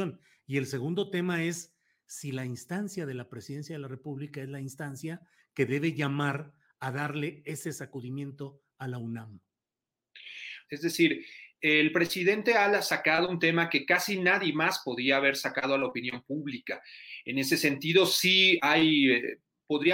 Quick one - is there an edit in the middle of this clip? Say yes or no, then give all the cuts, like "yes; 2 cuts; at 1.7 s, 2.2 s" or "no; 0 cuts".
yes; 1 cut; at 10.7 s